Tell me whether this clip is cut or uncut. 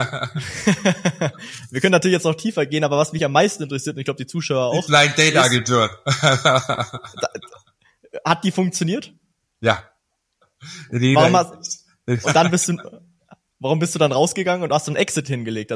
cut